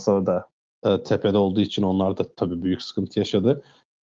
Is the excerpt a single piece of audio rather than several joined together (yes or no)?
yes